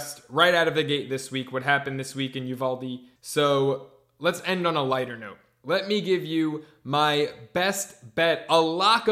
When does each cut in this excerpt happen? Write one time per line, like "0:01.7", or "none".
none